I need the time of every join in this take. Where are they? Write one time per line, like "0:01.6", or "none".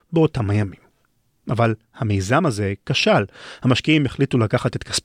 none